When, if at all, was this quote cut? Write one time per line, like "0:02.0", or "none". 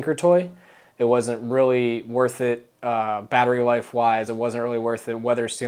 none